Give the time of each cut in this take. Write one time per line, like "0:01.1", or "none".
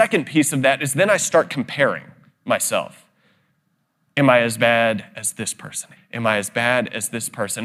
0:06.0